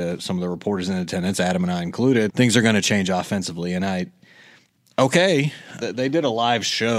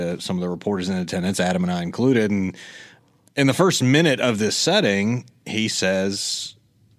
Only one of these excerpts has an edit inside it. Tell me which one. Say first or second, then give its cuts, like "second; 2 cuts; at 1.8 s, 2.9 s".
first; 2 cuts; at 2.3 s, 5.8 s